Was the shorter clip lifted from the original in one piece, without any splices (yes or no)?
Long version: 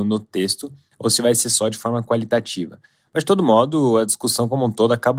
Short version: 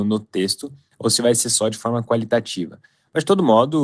yes